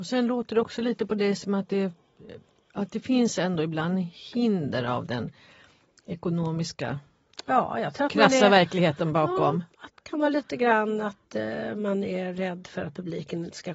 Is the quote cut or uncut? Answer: uncut